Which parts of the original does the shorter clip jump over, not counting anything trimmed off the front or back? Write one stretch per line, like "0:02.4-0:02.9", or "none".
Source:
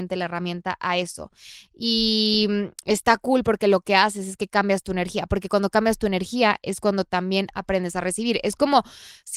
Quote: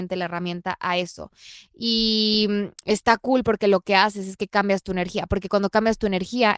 none